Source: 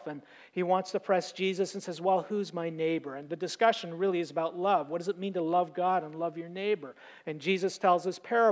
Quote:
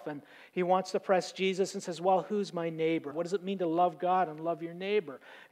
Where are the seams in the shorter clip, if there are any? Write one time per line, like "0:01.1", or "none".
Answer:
0:03.1